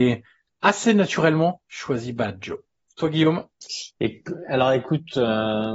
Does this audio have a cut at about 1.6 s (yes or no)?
yes